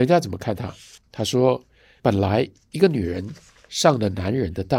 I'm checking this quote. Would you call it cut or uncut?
cut